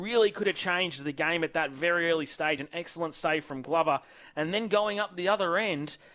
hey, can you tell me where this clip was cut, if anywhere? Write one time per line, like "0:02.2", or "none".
none